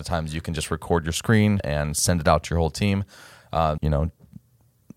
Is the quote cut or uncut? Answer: cut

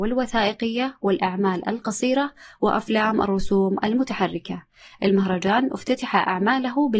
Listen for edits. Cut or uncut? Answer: uncut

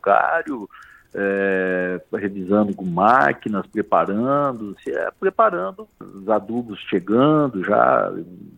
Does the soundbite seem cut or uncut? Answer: cut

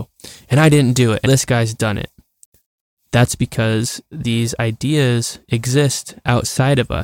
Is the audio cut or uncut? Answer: cut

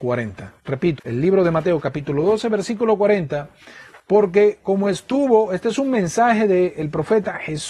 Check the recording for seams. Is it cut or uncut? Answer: cut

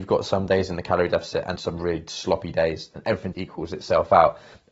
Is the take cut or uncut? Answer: cut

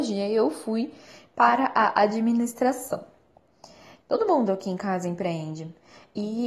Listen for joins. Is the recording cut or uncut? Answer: cut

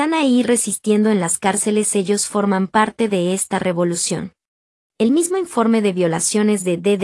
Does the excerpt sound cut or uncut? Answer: cut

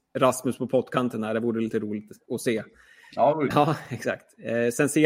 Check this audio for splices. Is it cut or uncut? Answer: cut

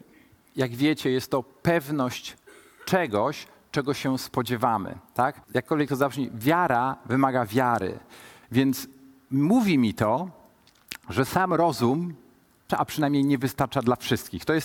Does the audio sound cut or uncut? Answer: cut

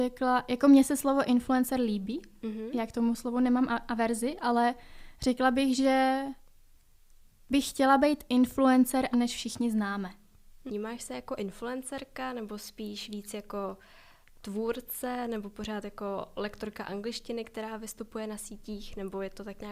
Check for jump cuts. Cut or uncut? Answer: cut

